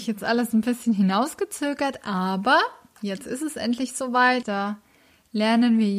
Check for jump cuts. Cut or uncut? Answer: cut